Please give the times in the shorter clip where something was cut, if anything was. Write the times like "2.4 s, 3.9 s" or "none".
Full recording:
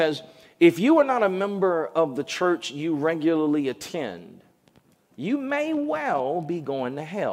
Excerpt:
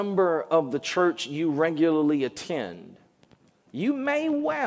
none

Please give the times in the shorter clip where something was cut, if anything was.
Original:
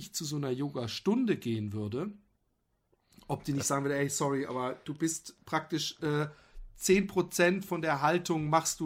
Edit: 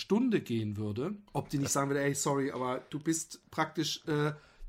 1.3 s

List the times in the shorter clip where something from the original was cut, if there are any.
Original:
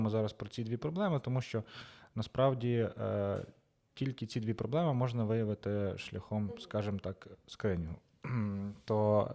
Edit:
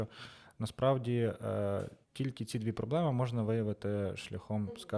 2.0 s

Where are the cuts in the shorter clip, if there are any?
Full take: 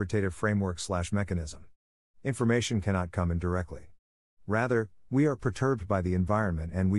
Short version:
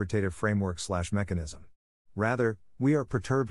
2.0 s

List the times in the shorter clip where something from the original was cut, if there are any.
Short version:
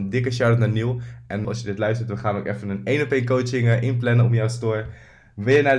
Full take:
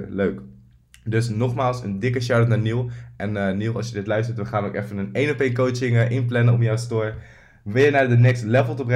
1.4 s

